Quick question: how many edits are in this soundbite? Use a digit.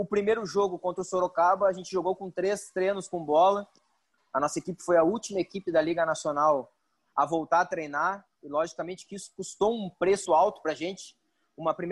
2